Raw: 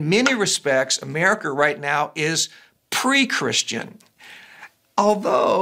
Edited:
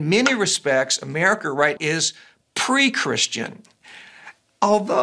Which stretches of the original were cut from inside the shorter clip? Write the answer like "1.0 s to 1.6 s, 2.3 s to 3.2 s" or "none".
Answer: 1.8 s to 2.1 s